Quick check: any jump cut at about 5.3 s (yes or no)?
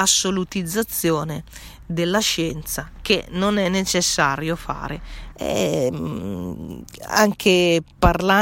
yes